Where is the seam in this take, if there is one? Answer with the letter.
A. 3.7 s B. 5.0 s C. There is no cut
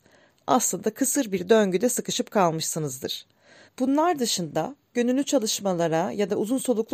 A